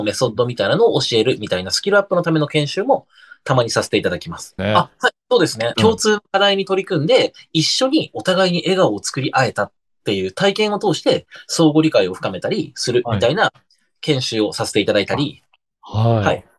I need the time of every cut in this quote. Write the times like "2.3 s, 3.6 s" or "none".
4.6 s, 5.7 s